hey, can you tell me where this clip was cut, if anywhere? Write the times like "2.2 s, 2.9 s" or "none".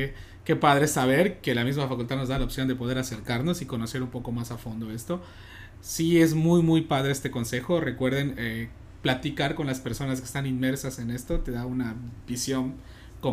none